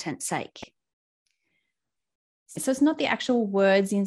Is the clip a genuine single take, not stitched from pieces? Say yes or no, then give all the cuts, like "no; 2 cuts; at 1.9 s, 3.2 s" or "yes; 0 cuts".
no; 1 cut; at 2.6 s